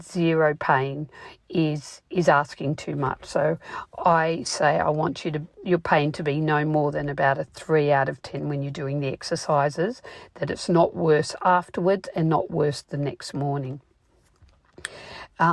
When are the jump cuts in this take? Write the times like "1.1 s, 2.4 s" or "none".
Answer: 5.5 s